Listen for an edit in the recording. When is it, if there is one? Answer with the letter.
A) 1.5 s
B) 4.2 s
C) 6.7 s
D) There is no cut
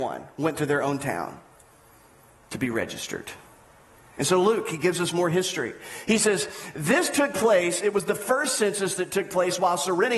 B